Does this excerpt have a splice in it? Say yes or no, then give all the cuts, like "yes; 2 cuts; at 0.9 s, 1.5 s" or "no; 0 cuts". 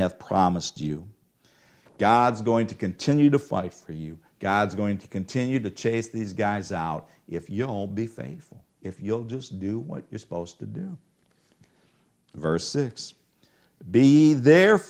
no; 0 cuts